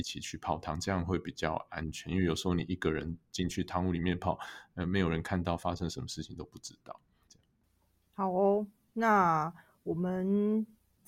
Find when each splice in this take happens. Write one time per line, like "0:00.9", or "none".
0:07.3
0:08.8